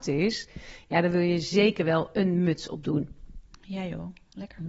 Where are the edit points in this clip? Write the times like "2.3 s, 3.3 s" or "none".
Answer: none